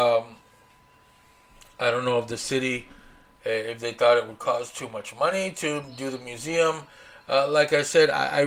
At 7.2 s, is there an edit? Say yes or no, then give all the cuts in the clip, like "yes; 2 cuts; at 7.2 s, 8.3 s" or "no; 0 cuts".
no; 0 cuts